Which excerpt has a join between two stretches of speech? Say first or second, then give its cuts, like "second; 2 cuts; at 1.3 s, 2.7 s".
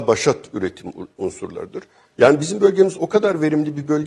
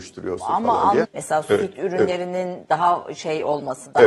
second; 1 cut; at 1.0 s